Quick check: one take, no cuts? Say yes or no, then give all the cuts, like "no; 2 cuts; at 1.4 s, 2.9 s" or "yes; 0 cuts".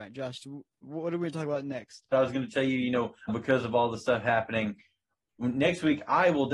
no; 2 cuts; at 2.1 s, 3.3 s